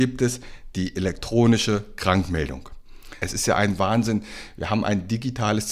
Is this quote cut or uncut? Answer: cut